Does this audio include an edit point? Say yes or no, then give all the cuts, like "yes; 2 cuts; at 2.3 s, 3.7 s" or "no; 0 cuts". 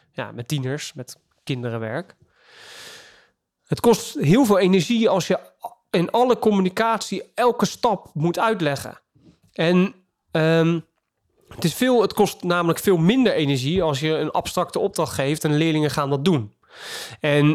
no; 0 cuts